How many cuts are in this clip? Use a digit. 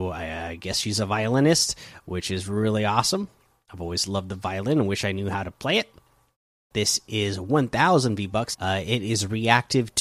2